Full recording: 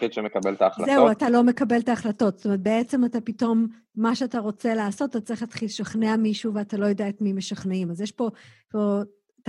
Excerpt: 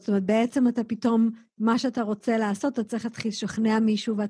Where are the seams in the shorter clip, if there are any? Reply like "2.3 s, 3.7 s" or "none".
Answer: none